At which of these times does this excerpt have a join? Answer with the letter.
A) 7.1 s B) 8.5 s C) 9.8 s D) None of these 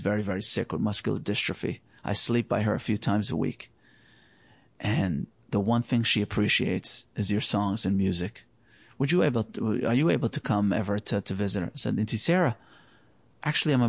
A